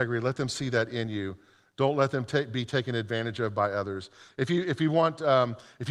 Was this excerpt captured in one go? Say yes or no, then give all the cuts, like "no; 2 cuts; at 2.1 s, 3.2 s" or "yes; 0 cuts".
yes; 0 cuts